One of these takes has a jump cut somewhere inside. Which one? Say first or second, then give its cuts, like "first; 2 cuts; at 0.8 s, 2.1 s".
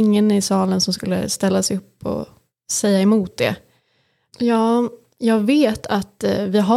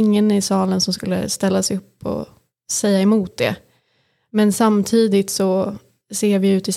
first; 1 cut; at 4.3 s